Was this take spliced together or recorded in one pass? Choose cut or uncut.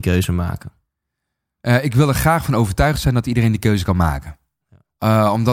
uncut